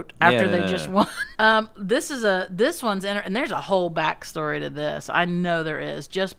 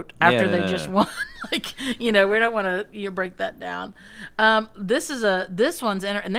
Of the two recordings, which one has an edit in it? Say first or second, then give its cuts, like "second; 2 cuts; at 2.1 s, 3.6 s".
first; 1 cut; at 1.3 s